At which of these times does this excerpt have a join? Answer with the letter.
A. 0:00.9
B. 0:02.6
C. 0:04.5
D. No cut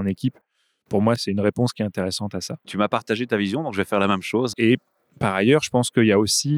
C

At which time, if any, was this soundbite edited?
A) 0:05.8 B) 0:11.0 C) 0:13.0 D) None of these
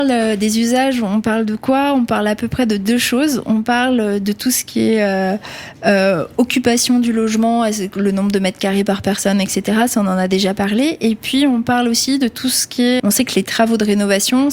C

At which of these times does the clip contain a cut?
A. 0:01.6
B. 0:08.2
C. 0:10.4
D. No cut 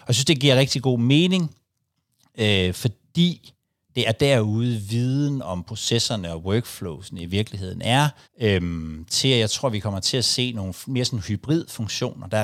B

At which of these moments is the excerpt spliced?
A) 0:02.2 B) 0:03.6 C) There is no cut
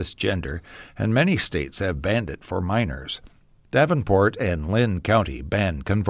C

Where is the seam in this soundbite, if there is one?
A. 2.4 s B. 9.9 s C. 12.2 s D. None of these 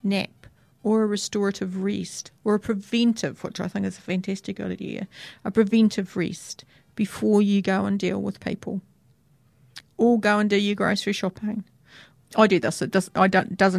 C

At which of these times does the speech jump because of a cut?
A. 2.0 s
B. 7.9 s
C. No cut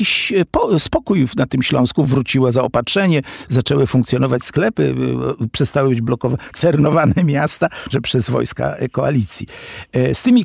B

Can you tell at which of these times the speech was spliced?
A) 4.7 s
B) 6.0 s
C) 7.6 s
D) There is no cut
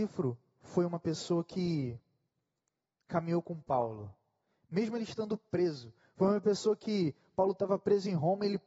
D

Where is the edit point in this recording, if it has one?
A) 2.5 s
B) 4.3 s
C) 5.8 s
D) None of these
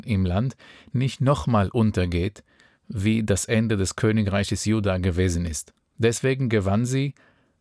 C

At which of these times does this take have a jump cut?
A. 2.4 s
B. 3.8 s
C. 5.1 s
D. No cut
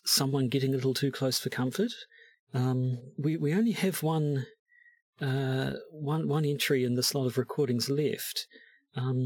A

